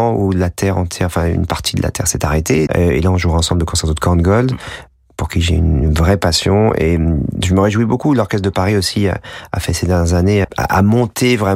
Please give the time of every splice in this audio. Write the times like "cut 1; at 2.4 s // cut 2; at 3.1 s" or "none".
cut 1; at 2.7 s // cut 2; at 10.4 s